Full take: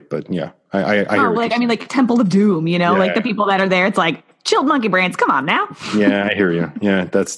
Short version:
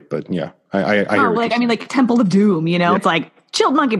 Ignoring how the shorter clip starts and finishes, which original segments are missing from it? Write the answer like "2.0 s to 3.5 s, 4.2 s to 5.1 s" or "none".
3.0 s to 3.9 s